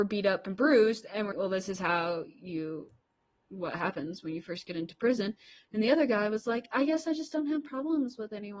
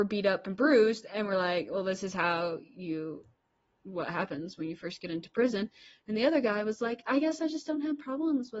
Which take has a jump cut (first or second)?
first